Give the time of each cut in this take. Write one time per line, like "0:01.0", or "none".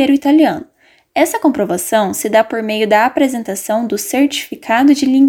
none